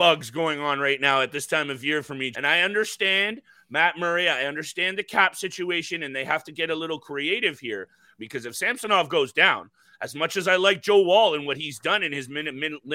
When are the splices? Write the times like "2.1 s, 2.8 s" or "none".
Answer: 2.3 s, 8.2 s